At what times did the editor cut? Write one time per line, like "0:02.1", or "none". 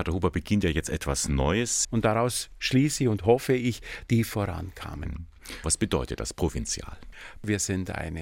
0:01.8
0:04.1
0:05.6